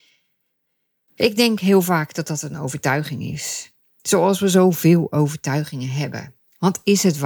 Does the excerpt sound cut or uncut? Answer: uncut